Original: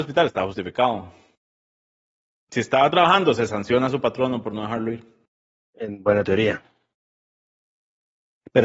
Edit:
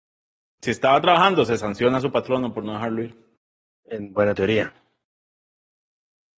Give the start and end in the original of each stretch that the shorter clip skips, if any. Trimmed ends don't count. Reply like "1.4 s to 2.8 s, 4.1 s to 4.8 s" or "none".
none

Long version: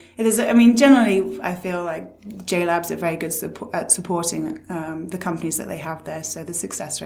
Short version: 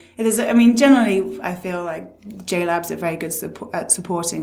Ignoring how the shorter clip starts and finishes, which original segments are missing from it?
none

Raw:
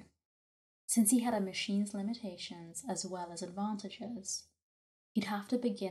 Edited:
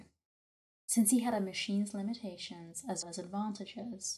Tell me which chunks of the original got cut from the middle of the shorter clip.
3.0 s to 3.3 s

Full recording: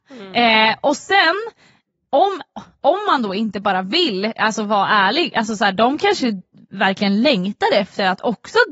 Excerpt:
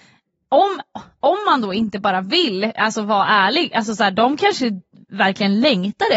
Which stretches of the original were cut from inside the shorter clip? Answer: none

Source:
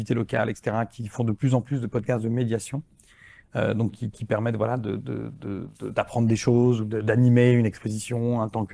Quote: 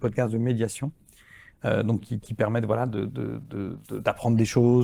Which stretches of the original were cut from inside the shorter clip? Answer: none

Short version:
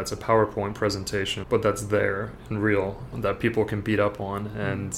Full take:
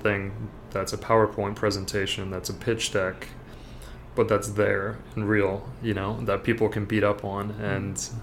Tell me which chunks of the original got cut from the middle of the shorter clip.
2.2 s to 4.1 s, 5.8 s to 6.2 s

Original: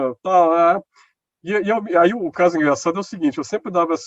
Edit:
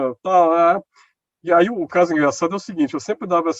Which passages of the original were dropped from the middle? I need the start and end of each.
1.5 s to 1.9 s

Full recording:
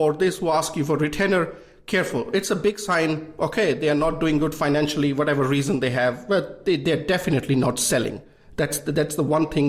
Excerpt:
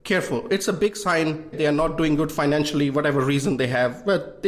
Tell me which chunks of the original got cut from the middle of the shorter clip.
3.4 s to 3.8 s

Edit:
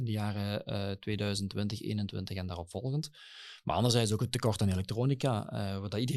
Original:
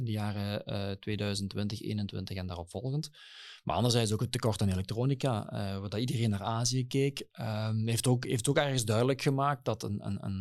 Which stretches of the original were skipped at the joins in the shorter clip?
none

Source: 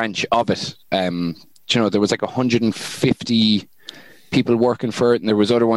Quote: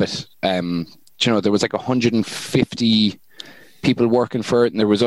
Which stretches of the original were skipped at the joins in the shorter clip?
none

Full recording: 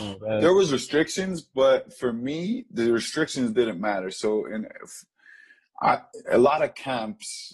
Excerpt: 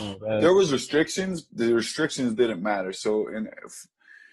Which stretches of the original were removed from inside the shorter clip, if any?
1.5 s to 2.7 s

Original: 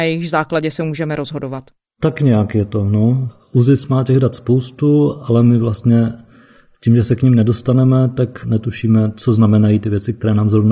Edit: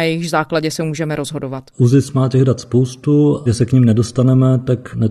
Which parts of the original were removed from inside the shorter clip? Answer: 1.7 s to 3.5 s, 5.2 s to 7.0 s

